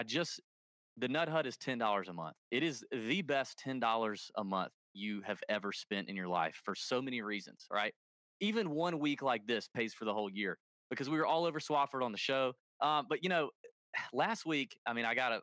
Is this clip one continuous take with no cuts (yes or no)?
no